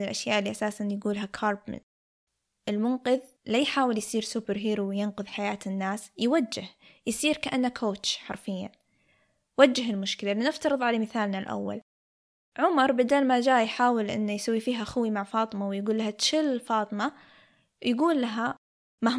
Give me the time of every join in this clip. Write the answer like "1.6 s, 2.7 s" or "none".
3.4 s